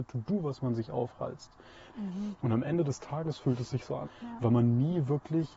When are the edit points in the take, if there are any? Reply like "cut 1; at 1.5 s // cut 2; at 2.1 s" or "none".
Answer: cut 1; at 1.9 s // cut 2; at 4.0 s